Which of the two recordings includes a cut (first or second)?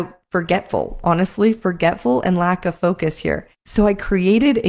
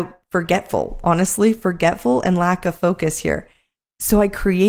first